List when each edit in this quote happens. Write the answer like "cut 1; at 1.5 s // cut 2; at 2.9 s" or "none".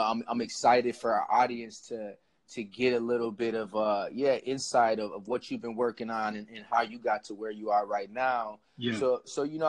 none